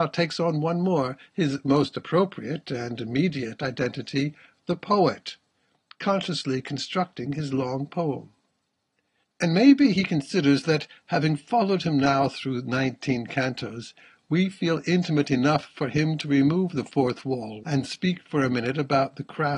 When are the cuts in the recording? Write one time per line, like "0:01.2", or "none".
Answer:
0:17.6